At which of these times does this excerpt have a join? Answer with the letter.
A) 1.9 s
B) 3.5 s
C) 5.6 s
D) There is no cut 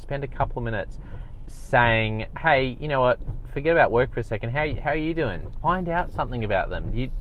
C